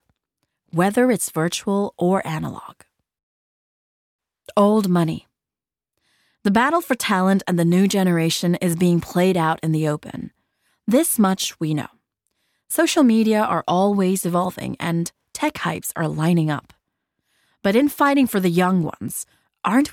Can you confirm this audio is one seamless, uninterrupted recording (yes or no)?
yes